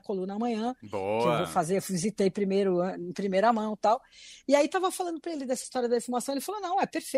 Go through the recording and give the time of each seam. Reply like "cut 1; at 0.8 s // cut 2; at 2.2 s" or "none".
none